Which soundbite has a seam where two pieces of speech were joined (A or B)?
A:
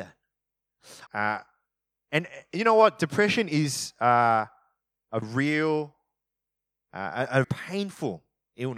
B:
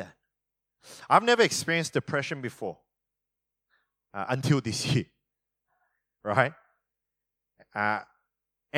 A